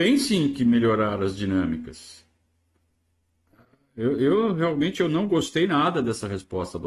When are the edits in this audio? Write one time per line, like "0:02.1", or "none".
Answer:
none